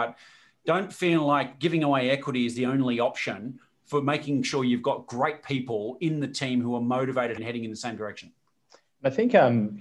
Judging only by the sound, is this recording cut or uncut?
cut